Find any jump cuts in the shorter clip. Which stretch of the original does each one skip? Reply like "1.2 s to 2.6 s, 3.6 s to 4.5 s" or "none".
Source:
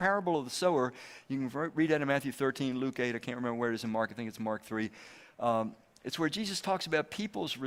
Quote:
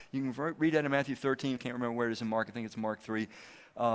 2.7 s to 3.2 s